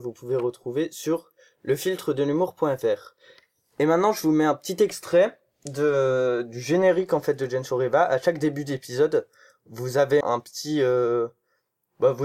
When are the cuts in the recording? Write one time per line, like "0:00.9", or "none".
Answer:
0:10.2